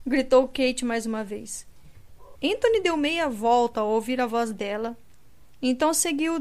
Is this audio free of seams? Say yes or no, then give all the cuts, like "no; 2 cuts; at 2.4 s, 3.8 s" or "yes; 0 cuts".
no; 1 cut; at 2.3 s